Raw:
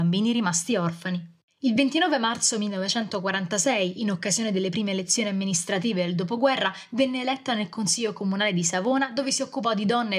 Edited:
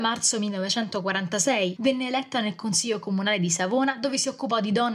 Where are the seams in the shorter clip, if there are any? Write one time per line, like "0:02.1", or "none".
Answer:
0:01.8